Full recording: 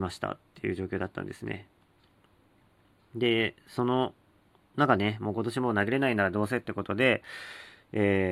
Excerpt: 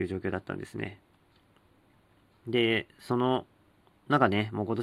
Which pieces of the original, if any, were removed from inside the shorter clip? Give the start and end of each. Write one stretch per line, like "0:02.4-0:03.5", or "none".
none